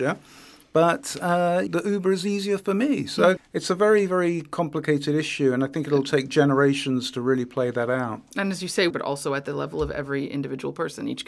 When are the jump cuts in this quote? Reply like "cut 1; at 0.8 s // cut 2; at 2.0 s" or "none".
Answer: cut 1; at 1.7 s // cut 2; at 3.4 s // cut 3; at 8.9 s